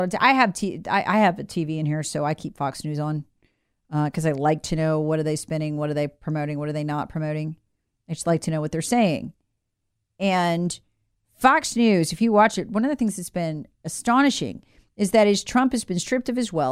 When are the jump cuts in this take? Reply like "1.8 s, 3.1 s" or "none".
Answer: none